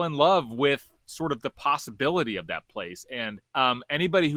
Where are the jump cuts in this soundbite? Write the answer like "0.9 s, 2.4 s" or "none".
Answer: 3.5 s